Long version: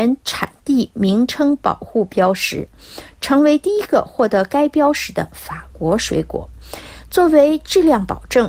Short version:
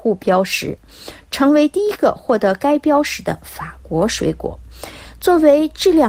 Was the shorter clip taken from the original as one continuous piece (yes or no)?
yes